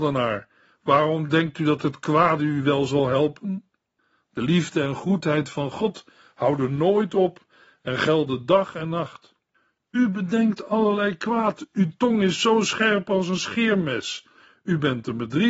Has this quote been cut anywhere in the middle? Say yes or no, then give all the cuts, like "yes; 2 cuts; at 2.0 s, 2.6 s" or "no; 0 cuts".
no; 0 cuts